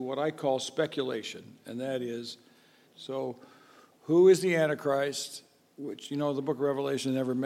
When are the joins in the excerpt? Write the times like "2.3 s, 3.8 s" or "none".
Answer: 2.9 s